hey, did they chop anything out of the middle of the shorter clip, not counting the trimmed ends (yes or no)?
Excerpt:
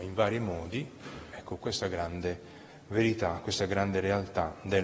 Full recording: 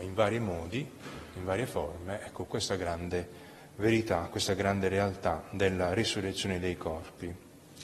yes